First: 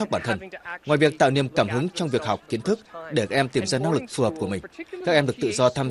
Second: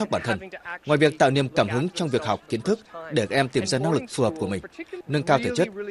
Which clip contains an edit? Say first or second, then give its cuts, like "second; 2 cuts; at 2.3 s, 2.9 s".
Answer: second; 1 cut; at 5.0 s